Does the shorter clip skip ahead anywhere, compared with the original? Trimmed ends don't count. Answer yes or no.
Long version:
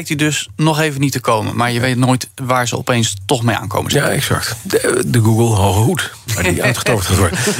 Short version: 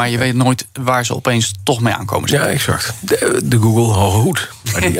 no